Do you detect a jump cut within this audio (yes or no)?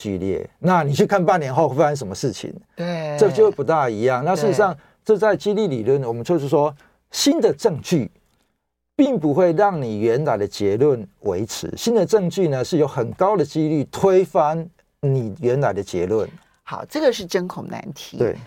no